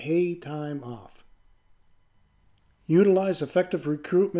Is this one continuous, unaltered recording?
yes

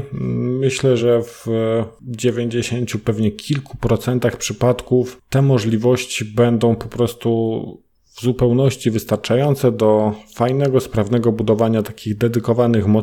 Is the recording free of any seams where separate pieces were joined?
yes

